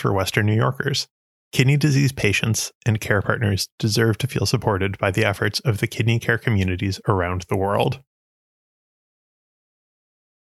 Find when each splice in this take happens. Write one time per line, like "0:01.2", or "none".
0:01.4